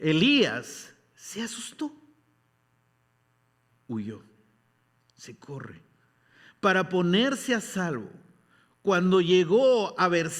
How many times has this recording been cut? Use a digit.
1